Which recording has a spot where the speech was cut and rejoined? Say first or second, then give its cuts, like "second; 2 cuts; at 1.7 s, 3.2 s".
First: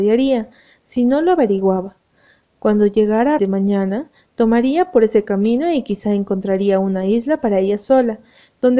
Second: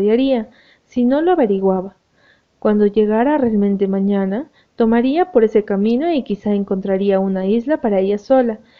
first; 1 cut; at 3.4 s